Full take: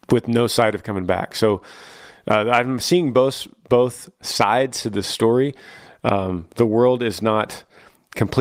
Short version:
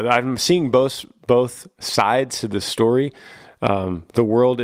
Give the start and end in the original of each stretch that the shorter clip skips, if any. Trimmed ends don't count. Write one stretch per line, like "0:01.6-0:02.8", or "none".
none

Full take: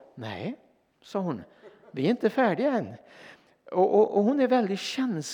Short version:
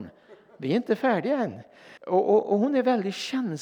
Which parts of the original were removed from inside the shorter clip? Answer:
0:03.3-0:03.6

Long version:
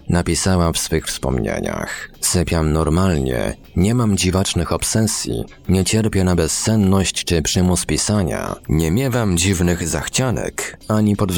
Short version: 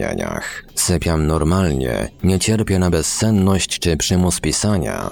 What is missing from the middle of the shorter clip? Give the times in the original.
0:03.6-0:05.6

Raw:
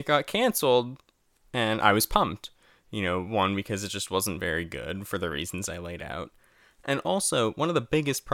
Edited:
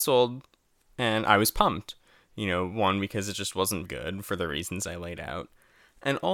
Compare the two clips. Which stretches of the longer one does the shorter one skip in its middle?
0:04.4-0:04.7

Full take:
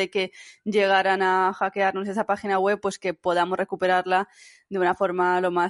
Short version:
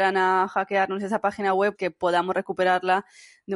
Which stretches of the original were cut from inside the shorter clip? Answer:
0:02.8-0:03.0

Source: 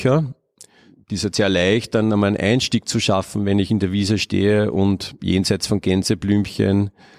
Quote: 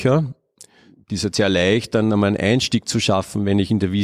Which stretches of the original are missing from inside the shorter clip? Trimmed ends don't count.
none

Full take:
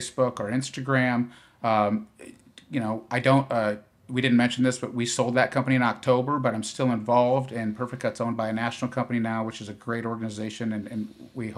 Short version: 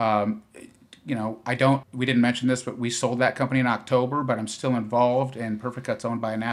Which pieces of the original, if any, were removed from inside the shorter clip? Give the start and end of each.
0:03.5-0:04.0

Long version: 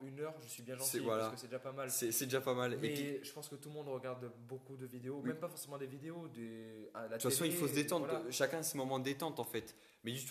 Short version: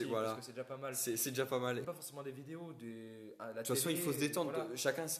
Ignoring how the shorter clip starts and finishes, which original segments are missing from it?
0:02.8-0:05.4

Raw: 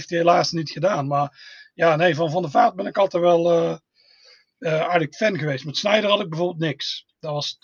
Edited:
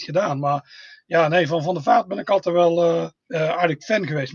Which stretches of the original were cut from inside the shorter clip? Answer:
0:03.9-0:04.5

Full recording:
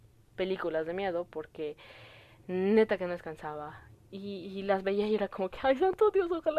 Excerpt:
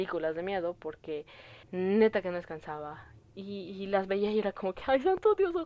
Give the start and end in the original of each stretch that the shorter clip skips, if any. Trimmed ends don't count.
0:02.1-0:02.4

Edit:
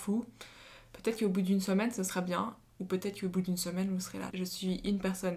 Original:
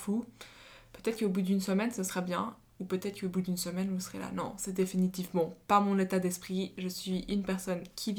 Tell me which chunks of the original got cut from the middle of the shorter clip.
0:04.3-0:06.7

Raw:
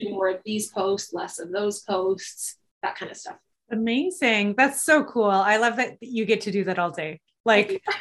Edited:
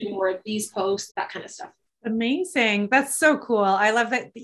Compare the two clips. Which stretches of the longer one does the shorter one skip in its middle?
0:01.1-0:02.8

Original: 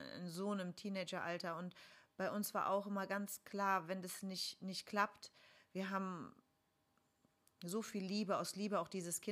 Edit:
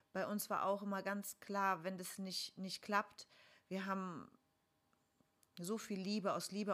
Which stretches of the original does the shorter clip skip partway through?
none

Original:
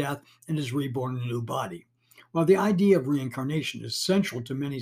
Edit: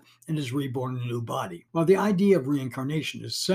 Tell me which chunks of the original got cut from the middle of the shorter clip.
0:01.9-0:02.3

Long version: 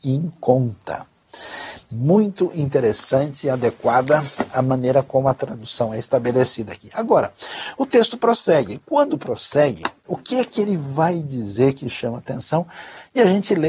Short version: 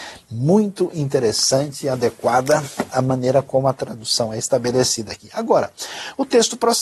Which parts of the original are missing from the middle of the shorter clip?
none

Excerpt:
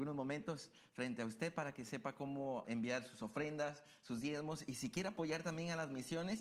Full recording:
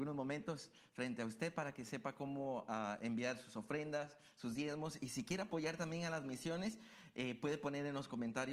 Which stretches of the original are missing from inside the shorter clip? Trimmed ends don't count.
0:02.6-0:03.0

